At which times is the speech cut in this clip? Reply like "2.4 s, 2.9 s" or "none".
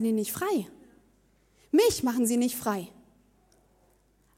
none